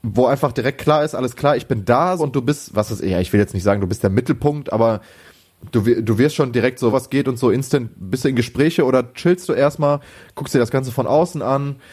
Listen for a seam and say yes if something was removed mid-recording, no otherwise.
yes